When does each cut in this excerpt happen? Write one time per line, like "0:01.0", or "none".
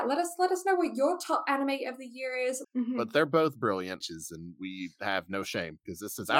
0:02.6
0:04.0